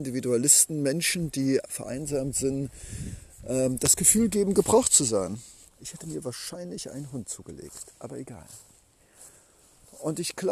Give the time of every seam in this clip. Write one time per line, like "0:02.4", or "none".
0:05.7